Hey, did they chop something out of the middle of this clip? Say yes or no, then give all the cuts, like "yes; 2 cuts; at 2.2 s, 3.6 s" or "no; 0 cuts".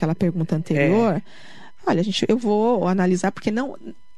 no; 0 cuts